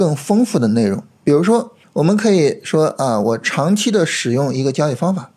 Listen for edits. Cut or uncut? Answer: uncut